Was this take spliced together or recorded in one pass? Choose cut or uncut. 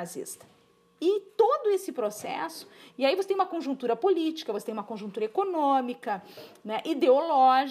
uncut